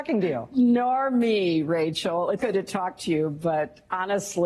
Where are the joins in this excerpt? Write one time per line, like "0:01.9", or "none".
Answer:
0:02.4